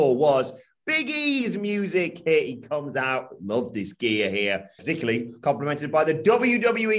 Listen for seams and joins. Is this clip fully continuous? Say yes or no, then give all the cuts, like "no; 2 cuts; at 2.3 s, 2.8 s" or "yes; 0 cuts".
no; 1 cut; at 4.8 s